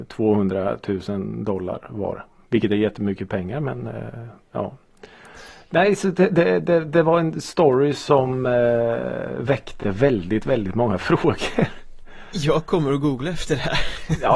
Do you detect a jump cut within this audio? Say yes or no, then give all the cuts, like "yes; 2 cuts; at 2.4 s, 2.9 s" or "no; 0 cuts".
no; 0 cuts